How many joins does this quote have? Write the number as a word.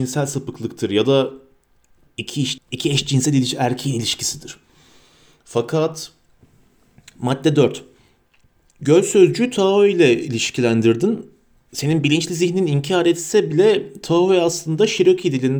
one